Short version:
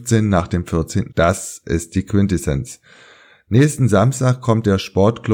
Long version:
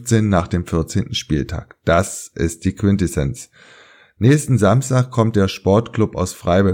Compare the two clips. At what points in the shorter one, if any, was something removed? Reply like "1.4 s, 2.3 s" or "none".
1.1 s

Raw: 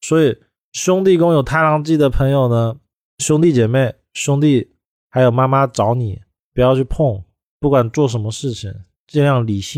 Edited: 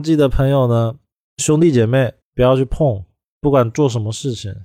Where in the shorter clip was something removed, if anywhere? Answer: 2.2 s

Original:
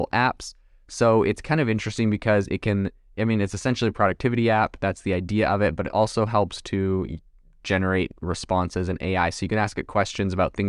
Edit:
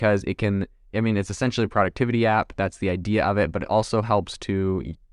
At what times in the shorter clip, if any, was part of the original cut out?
none

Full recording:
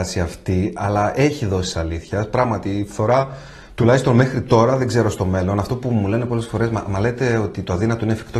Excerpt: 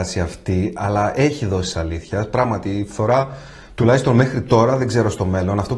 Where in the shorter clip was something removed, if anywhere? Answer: none

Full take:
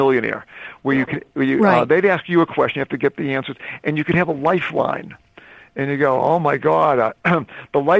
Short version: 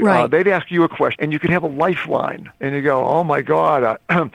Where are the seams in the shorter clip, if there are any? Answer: 1.1 s, 2.5 s

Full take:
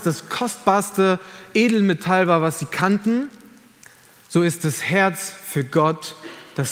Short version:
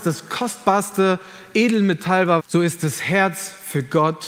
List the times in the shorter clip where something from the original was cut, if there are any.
2.4 s

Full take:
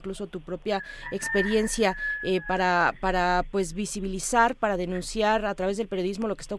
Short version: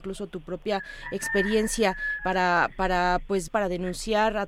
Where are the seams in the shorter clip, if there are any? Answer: 2.2 s, 3.5 s

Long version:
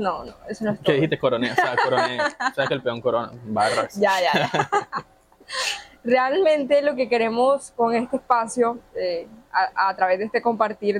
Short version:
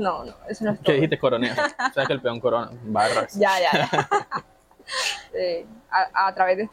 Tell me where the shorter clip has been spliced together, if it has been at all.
1.6 s, 5.3 s

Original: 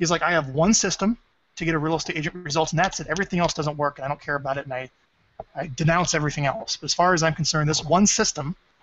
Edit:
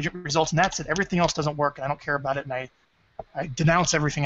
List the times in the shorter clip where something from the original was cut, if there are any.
none

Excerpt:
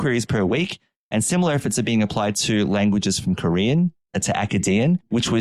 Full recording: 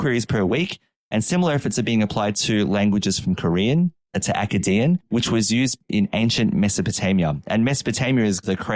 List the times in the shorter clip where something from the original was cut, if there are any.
none

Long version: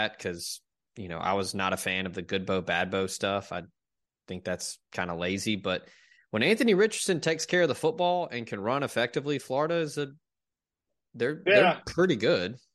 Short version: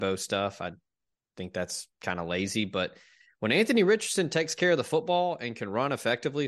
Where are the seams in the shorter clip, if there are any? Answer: none

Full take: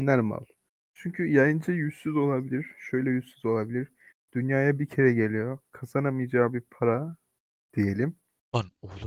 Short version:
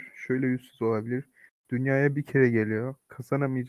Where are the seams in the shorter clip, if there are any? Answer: none

